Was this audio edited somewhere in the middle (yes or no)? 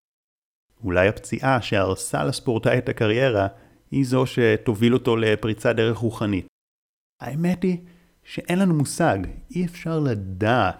no